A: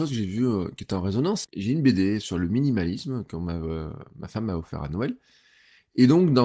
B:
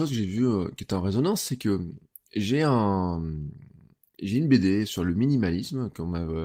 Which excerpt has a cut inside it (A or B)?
A